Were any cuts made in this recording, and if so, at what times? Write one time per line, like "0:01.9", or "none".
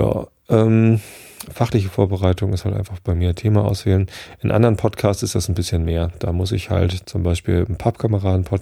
0:01.5